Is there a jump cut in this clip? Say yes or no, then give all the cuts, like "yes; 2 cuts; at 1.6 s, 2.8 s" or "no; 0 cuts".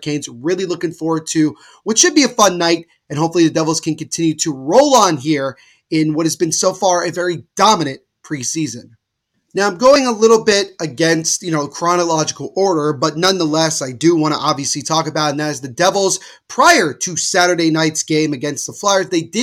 no; 0 cuts